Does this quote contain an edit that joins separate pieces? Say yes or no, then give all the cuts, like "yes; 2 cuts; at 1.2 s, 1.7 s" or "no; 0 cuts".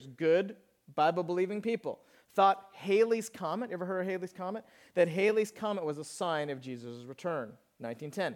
no; 0 cuts